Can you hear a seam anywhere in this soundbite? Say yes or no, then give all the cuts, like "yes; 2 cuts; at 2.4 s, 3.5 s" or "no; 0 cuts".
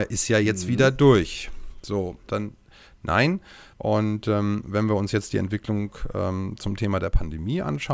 yes; 2 cuts; at 2.3 s, 3.7 s